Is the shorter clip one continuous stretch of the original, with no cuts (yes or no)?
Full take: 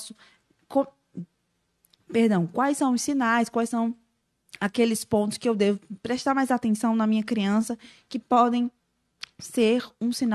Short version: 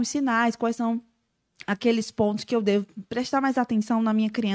yes